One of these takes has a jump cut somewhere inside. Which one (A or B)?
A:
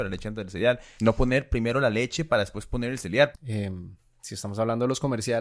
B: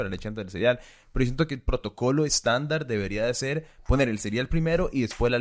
A